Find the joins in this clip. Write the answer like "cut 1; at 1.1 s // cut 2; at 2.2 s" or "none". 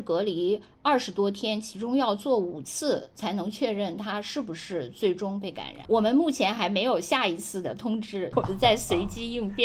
cut 1; at 5.9 s // cut 2; at 8.3 s